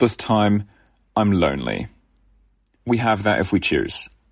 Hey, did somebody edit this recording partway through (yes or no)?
yes